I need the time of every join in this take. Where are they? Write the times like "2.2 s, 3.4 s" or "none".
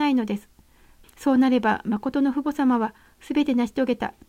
1.0 s

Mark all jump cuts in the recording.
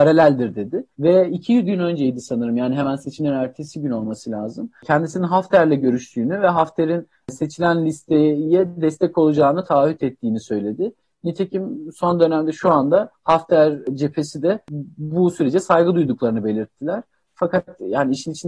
none

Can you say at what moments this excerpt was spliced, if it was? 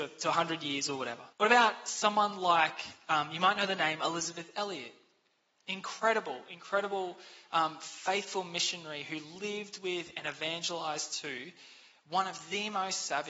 1.3 s

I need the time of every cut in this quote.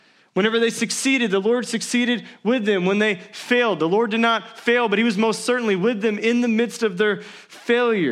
none

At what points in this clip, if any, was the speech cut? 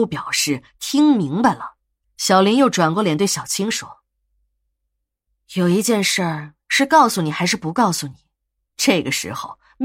2.0 s, 8.6 s

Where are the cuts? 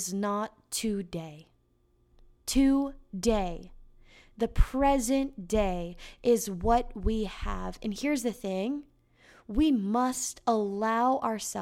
none

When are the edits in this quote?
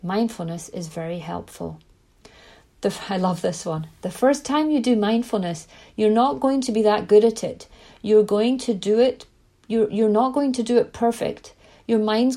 none

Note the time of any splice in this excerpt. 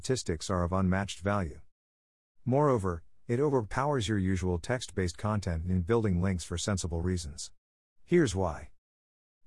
none

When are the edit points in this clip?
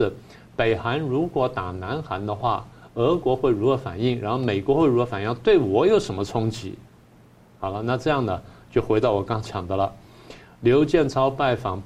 none

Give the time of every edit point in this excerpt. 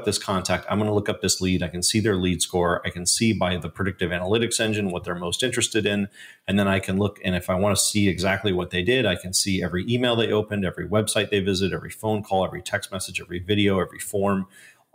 none

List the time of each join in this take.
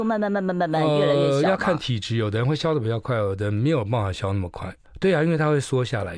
4.8 s

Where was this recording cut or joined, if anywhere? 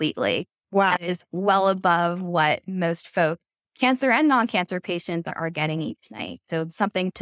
none

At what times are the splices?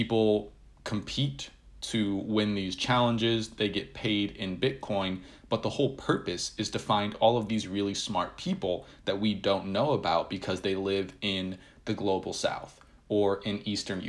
none

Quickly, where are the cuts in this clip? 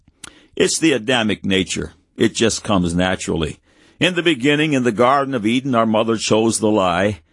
none

